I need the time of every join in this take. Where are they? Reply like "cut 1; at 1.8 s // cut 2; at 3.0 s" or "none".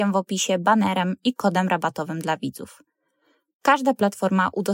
none